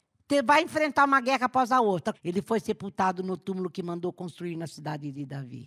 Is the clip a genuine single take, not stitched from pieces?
no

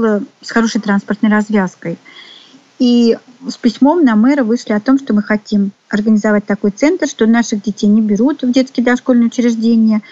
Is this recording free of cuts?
yes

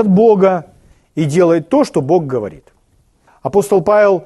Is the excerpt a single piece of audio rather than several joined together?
no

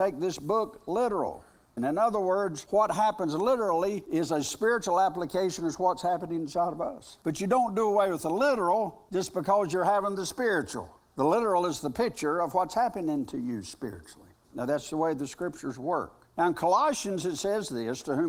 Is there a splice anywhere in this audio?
yes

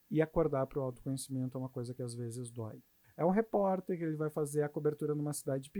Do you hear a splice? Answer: yes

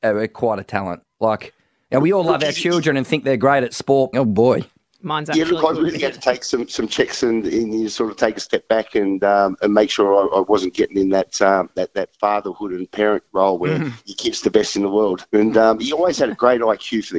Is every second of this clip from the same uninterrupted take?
no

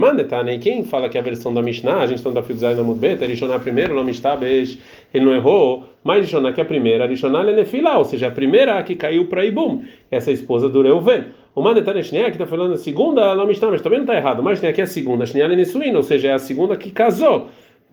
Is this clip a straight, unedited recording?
yes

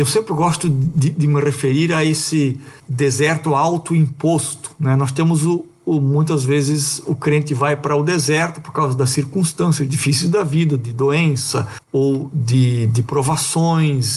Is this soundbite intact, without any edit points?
yes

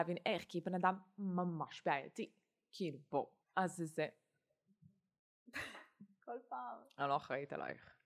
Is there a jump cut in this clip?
yes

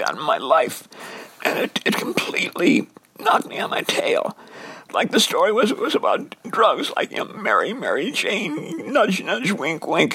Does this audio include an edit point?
no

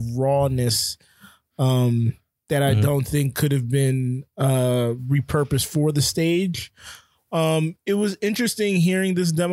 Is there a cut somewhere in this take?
no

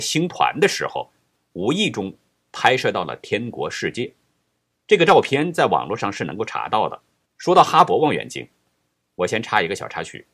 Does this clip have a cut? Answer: yes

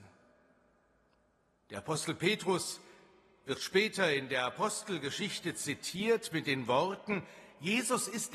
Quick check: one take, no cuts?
yes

